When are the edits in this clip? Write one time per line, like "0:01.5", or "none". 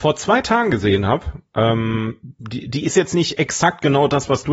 none